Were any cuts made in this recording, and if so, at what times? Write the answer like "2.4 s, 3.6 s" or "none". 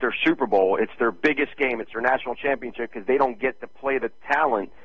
none